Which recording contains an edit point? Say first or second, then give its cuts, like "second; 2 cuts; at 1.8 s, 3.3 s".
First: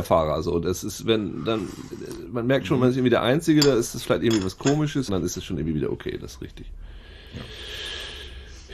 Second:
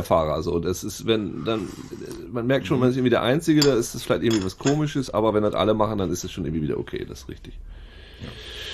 first; 1 cut; at 5.1 s